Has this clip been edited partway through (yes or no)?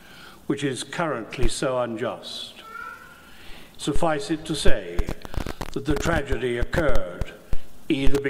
yes